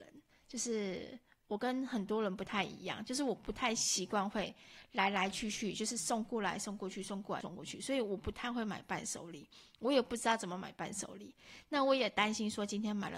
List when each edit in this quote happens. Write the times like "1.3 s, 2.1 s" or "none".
7.4 s

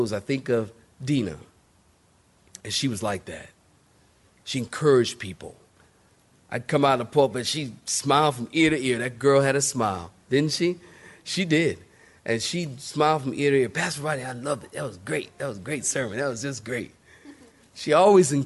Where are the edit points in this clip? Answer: none

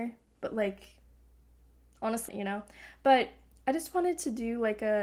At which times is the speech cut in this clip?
2.3 s

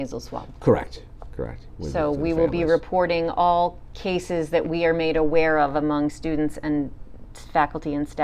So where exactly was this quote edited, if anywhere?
1.7 s

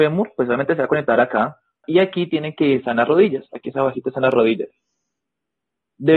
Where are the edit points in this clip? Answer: 1.8 s

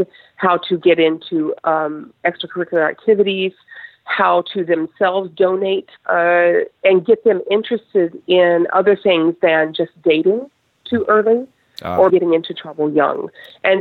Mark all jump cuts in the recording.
6.0 s, 12.1 s

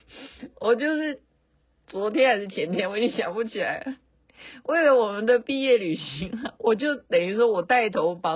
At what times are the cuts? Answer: none

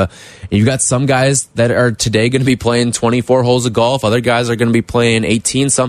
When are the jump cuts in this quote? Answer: none

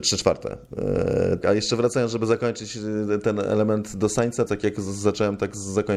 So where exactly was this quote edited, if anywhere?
1.4 s, 4.5 s

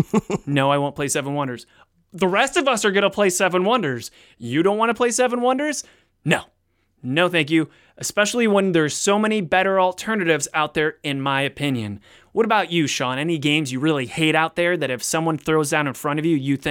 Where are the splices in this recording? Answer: none

